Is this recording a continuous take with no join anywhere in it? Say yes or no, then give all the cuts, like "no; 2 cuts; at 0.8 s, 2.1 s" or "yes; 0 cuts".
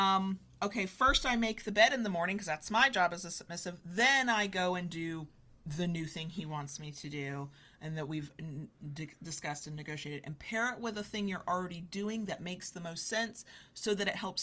yes; 0 cuts